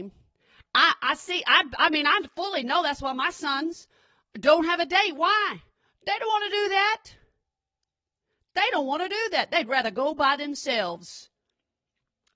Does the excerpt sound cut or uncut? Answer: uncut